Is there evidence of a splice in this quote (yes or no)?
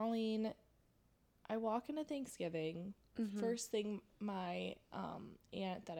no